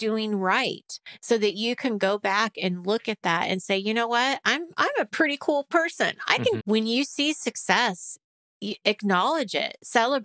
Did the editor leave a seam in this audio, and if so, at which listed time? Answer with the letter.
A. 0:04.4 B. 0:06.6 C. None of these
B